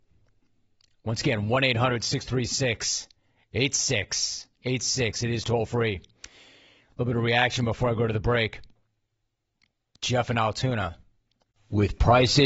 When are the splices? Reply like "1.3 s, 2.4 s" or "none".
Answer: 9.9 s